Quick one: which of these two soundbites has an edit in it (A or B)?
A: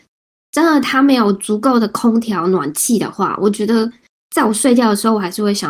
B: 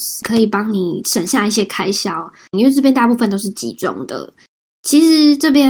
B